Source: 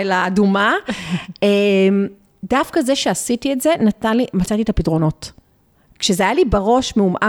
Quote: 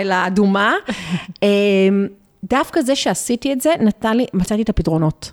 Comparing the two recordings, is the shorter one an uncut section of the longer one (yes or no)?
yes